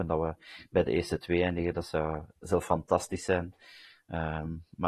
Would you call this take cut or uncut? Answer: uncut